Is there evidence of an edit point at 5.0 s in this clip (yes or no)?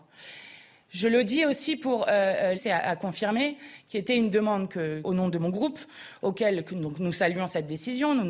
yes